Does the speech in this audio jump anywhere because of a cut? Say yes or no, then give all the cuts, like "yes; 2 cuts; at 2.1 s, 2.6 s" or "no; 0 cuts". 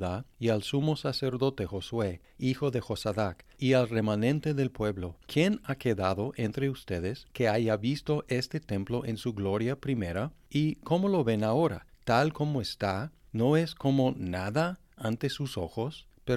no; 0 cuts